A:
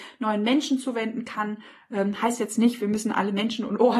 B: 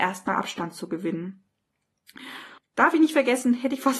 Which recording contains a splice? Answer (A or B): B